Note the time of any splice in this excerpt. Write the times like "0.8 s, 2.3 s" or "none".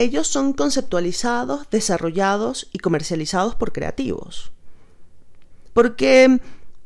5.7 s